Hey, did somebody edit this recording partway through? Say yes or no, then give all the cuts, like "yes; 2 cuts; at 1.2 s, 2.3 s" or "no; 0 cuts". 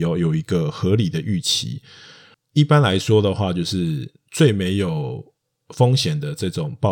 no; 0 cuts